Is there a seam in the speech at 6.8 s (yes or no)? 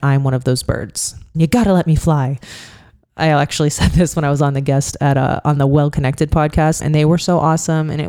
yes